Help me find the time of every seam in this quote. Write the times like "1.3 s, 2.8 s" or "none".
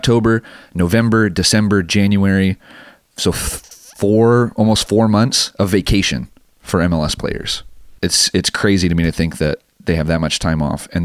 8.0 s